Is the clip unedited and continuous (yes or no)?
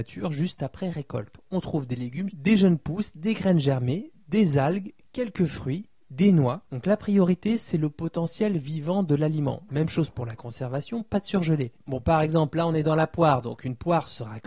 no